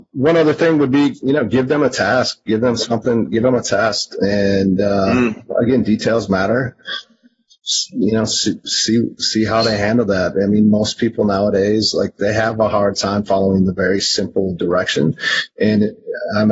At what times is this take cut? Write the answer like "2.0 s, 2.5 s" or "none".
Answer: none